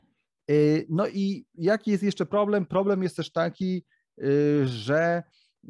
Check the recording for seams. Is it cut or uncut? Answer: uncut